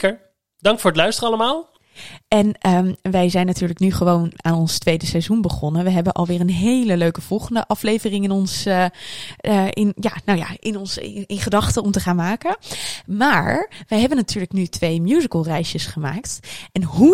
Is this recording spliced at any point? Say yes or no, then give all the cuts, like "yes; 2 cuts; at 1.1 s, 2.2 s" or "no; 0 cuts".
no; 0 cuts